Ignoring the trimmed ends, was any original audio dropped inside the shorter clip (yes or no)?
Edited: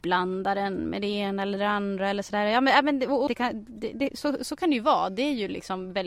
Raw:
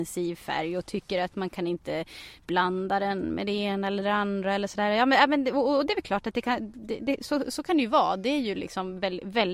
yes